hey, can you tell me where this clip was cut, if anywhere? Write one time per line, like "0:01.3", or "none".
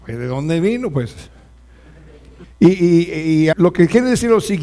0:02.4
0:03.5